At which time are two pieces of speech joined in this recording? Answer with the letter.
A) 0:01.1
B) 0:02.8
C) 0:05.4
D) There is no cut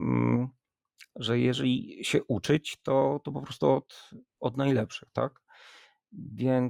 D